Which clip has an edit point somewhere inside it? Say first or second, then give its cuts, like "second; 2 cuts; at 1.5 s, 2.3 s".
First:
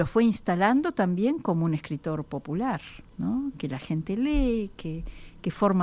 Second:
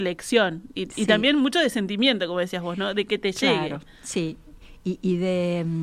first; 1 cut; at 3.1 s